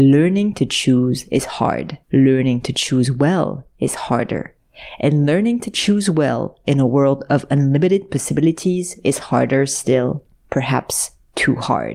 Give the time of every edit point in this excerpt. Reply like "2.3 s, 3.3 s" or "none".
2.0 s